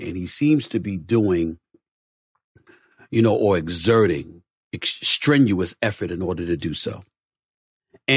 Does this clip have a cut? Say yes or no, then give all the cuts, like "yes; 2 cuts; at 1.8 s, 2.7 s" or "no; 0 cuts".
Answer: no; 0 cuts